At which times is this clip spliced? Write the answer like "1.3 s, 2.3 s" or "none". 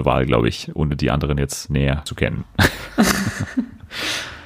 none